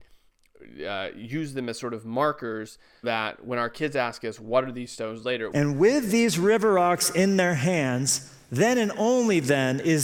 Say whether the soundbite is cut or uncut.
cut